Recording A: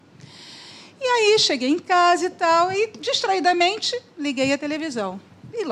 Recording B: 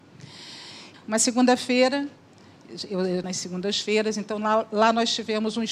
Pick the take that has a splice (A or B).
B